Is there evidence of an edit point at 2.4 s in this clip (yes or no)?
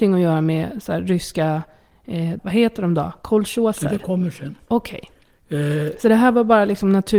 yes